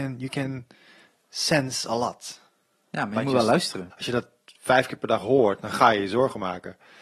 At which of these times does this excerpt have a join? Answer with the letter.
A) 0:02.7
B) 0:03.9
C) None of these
B